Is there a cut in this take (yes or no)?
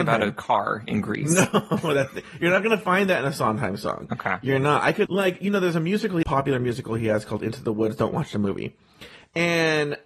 yes